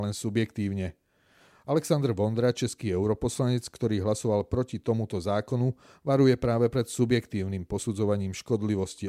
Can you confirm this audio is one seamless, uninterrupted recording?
yes; 0 cuts

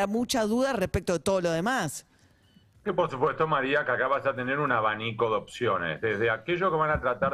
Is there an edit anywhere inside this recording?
no; 0 cuts

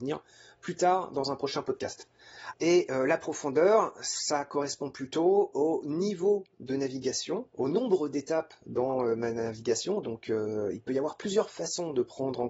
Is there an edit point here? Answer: yes; 1 cut; at 2.5 s

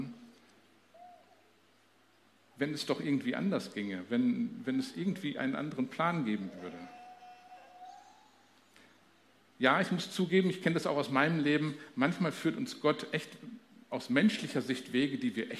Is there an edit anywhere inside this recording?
no; 0 cuts

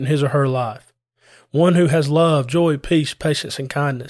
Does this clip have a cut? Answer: no; 0 cuts

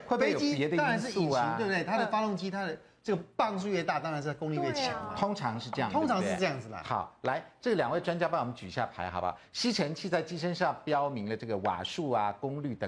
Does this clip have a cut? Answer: no; 0 cuts

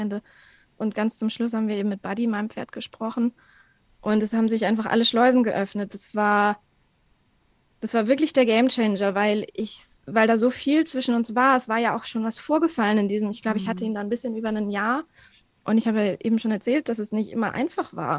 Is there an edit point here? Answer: no; 0 cuts

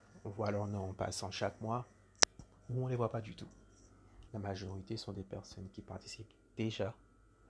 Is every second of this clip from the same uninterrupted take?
no; 1 cut; at 4.3 s

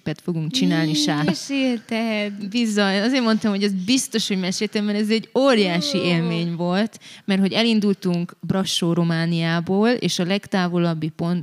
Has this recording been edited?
yes; 1 cut; at 1.3 s

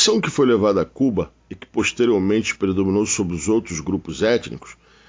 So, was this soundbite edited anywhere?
no; 0 cuts

